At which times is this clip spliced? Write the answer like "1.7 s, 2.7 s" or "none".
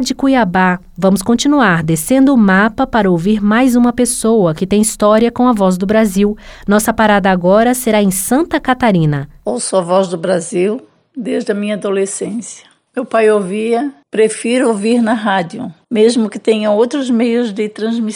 9.4 s